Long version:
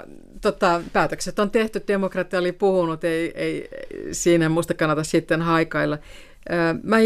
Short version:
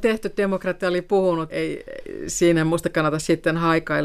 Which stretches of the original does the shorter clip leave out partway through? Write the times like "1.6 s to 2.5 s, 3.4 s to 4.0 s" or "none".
3.0 s to 3.3 s